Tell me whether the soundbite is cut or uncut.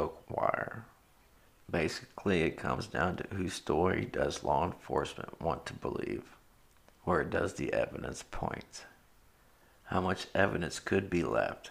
uncut